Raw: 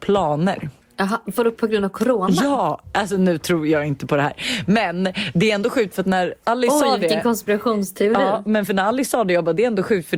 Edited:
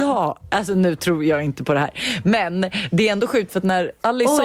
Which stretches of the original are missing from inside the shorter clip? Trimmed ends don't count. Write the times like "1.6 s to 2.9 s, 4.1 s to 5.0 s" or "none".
none